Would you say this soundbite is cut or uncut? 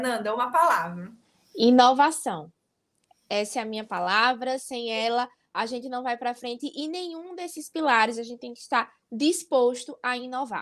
uncut